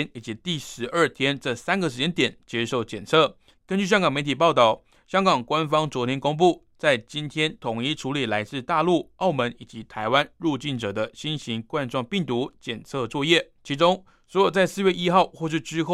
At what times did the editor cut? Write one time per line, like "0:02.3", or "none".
0:03.5
0:13.6